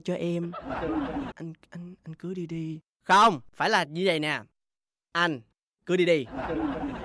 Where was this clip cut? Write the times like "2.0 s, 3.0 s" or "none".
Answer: 1.3 s